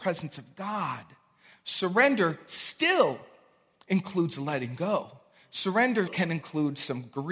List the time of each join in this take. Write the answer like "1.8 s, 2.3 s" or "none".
6.1 s